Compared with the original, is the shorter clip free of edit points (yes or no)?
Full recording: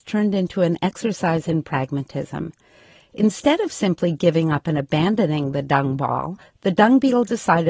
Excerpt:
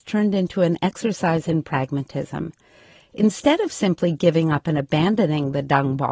yes